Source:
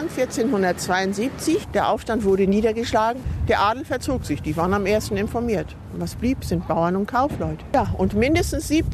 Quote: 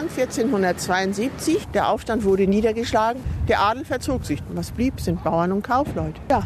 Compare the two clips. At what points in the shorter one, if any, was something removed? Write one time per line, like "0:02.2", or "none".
0:04.4